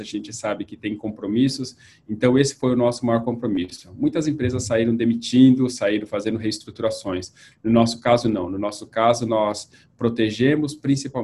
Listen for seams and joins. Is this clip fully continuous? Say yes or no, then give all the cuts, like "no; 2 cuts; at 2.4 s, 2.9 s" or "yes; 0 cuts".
yes; 0 cuts